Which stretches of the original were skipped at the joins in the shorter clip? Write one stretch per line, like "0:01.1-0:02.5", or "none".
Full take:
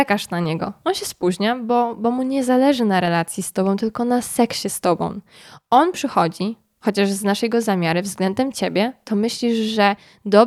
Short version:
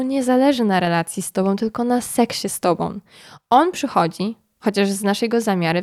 none